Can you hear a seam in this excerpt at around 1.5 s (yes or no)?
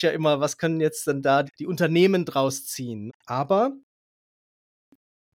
yes